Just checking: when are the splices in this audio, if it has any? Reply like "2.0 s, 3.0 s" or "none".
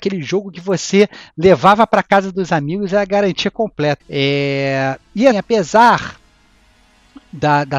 4.0 s, 5.3 s